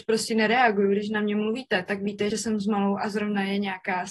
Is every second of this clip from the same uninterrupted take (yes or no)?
no